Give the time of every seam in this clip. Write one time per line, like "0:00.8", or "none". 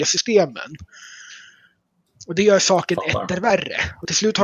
none